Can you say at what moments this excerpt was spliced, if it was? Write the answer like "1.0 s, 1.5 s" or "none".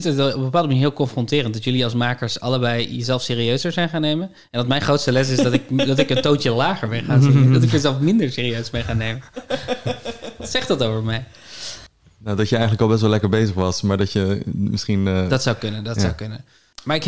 none